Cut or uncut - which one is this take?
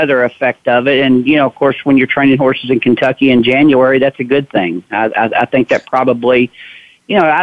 uncut